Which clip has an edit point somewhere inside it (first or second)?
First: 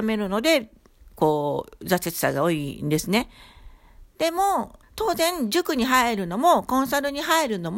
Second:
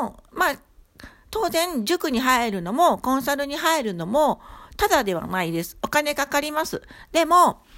first